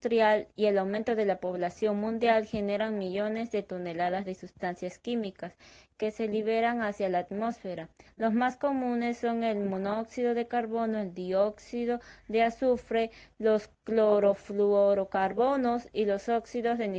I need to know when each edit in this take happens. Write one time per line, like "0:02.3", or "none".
0:08.1